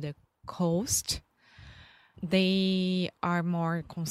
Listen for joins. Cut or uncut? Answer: cut